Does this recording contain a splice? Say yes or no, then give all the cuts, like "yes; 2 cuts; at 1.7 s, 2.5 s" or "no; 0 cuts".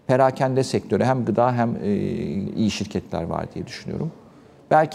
yes; 1 cut; at 2.5 s